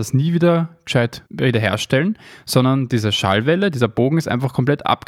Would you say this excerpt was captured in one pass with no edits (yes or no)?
no